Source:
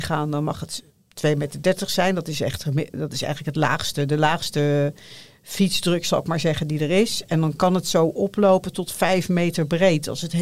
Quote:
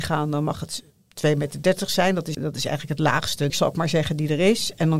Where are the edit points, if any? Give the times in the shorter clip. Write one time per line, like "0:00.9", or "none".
0:02.3
0:03.5